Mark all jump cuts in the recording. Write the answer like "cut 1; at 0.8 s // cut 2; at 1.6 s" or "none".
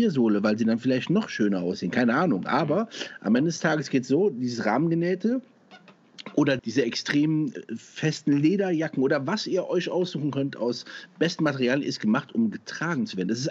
cut 1; at 6.6 s